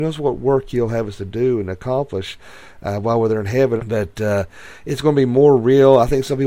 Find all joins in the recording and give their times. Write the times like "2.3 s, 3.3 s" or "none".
3.8 s